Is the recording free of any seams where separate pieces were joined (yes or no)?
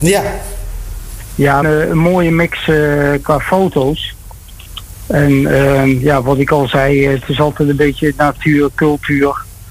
no